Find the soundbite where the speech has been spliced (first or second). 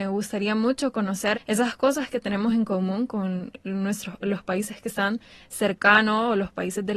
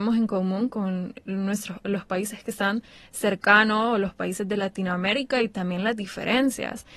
first